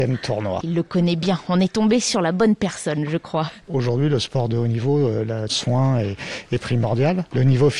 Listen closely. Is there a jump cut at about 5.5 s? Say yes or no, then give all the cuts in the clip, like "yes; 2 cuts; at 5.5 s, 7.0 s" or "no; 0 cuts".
yes; 2 cuts; at 3.6 s, 5.5 s